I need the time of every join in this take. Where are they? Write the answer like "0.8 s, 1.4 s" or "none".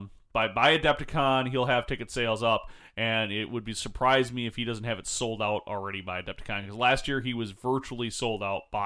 none

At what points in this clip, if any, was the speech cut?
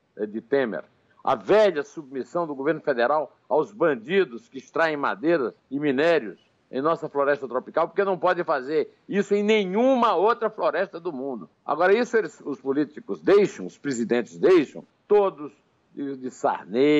5.6 s, 11.5 s, 14.9 s

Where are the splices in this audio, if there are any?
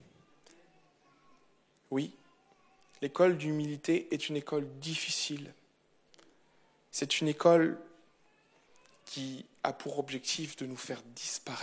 none

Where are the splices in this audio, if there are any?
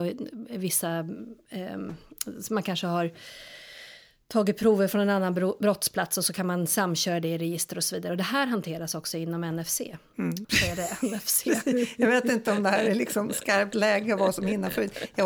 10.4 s

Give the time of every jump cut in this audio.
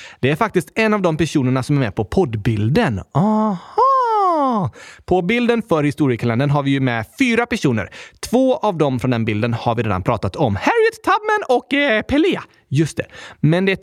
none

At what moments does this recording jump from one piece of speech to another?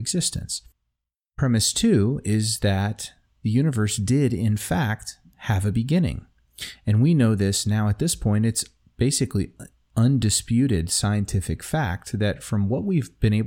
none

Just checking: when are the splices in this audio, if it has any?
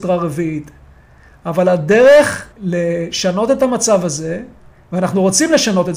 2.5 s

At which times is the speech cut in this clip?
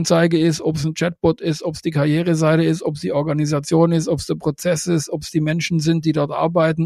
none

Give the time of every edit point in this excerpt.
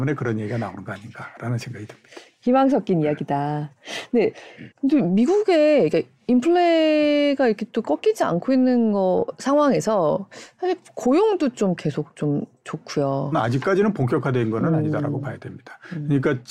4.7 s, 13.3 s

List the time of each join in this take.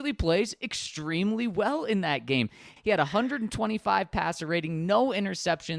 2.8 s

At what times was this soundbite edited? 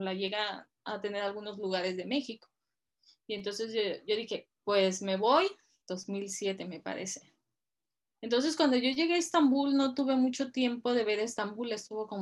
5.8 s

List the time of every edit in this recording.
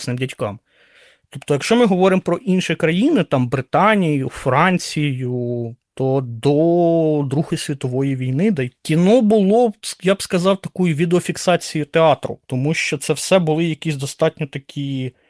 8.8 s

